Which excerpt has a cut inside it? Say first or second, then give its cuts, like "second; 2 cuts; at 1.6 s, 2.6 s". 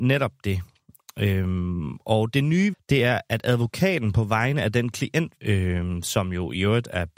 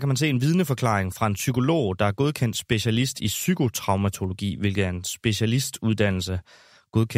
first; 2 cuts; at 2.7 s, 5.4 s